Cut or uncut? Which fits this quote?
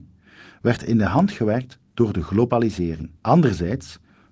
cut